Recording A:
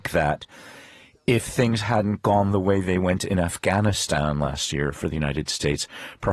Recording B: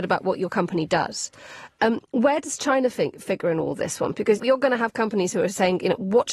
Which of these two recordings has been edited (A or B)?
B